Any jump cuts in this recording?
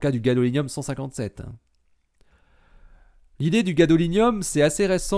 no; 0 cuts

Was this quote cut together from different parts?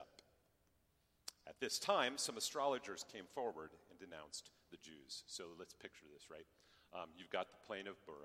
no; 0 cuts

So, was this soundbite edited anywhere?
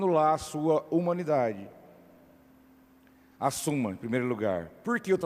no; 0 cuts

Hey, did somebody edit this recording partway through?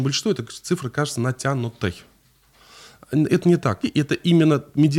yes; 1 cut; at 3.8 s

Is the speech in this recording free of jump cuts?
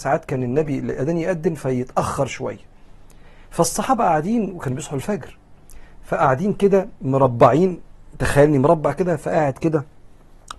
yes; 0 cuts

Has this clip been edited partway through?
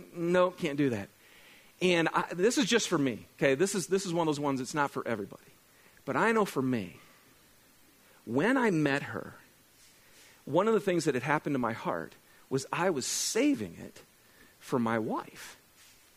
no; 0 cuts

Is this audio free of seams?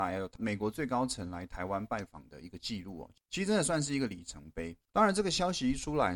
no; 1 cut; at 4.9 s

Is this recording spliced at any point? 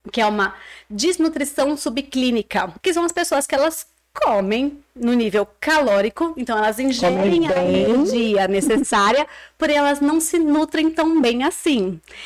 yes; 1 cut; at 2.8 s

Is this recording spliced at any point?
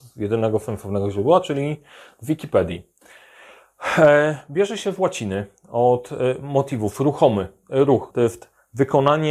yes; 1 cut; at 8.1 s

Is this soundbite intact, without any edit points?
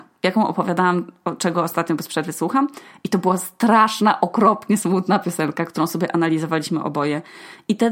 yes; 0 cuts

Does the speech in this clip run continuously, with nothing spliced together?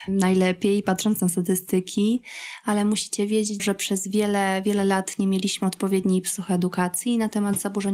no; 1 cut; at 3.6 s

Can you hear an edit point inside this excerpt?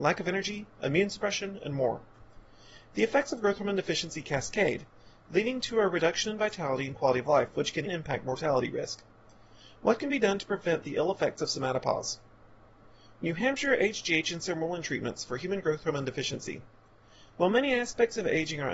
yes; 1 cut; at 7.9 s

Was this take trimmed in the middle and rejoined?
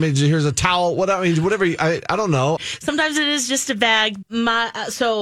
yes; 2 cuts; at 2.6 s, 4.2 s

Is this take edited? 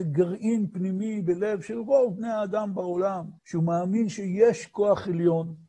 yes; 1 cut; at 3.4 s

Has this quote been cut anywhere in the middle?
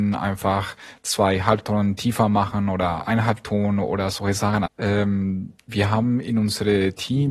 yes; 1 cut; at 4.7 s

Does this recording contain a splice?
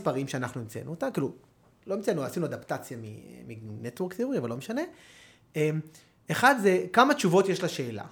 no; 0 cuts

